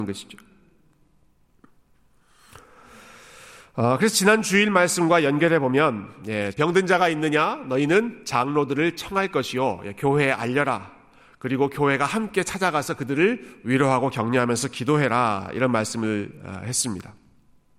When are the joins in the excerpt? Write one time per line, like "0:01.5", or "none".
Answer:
0:06.5